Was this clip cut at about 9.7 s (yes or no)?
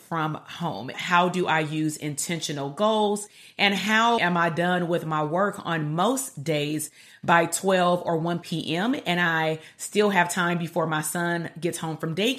no